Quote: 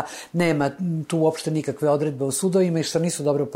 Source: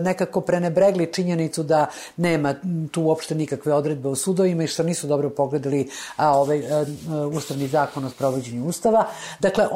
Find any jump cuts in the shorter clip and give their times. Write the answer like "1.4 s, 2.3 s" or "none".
none